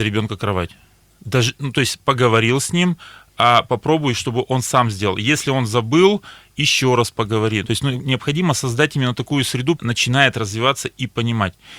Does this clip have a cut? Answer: yes; 2 cuts; at 7.6 s, 9.8 s

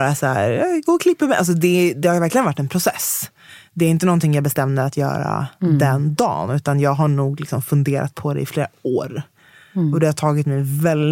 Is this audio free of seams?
yes; 0 cuts

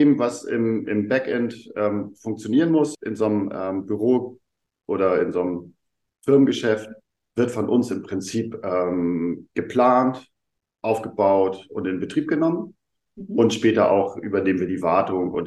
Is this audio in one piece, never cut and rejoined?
no; 1 cut; at 2.9 s

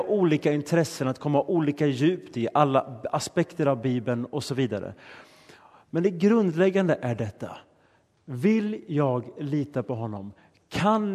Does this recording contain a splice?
no; 0 cuts

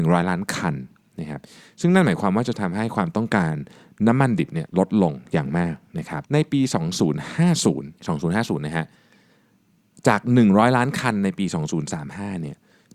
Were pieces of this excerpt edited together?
yes; 2 cuts; at 6.3 s, 8.0 s

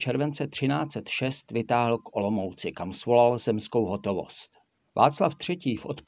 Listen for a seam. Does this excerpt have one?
yes; 1 cut; at 4.9 s

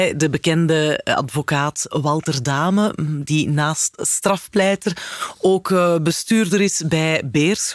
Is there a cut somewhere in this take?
no; 0 cuts

